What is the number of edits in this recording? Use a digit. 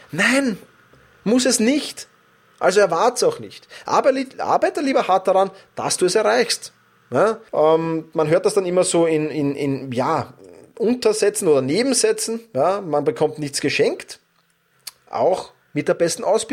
1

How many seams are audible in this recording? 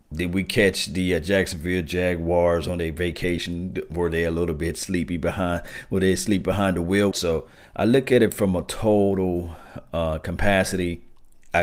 1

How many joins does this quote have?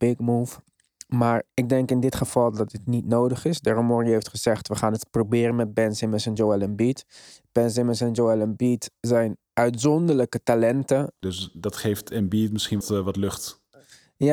2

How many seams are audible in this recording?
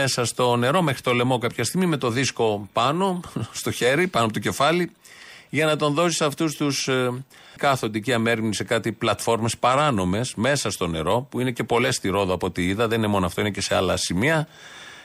1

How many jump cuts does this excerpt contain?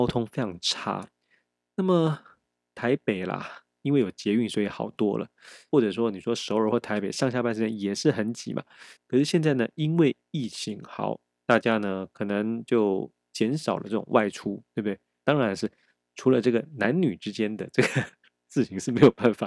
3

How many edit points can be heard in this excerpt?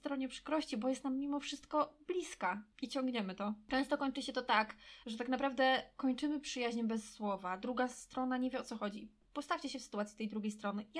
2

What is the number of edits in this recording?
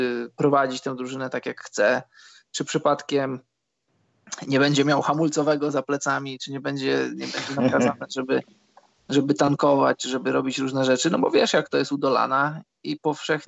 0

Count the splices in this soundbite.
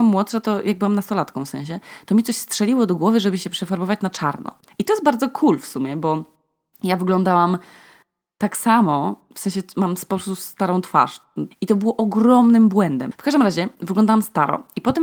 3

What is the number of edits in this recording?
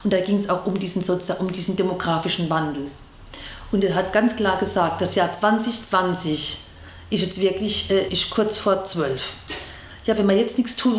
1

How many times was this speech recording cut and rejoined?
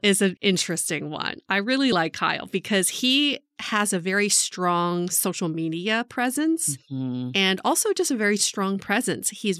0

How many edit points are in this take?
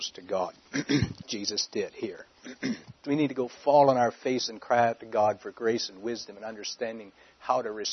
2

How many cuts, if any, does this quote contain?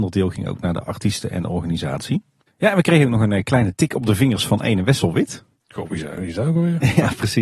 1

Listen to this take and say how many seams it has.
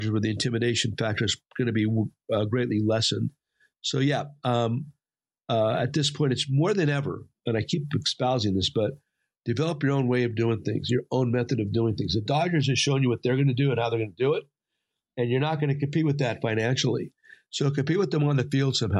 0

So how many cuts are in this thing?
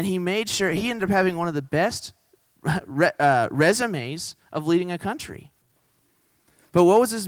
0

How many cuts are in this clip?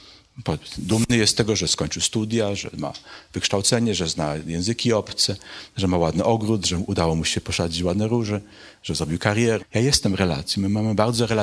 1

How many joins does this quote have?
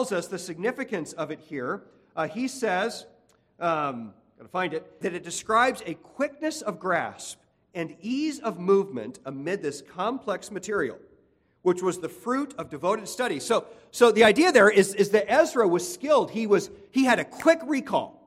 1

